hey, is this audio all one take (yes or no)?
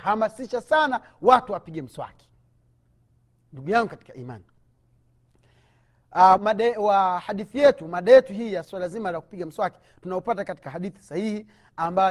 no